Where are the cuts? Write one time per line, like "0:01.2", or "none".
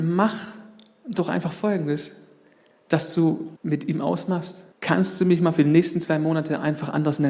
0:03.6
0:04.7